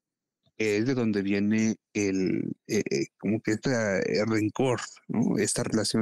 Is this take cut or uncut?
uncut